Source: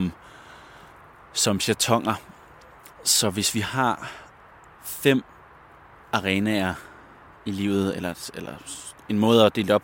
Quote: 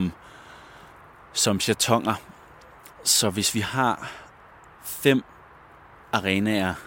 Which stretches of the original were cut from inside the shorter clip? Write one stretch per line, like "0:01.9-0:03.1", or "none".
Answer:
none